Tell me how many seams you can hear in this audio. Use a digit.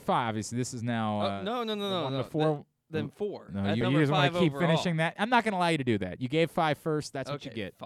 1